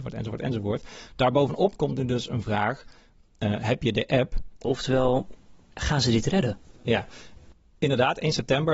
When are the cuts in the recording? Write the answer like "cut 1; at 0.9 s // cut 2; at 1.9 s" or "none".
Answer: cut 1; at 4.6 s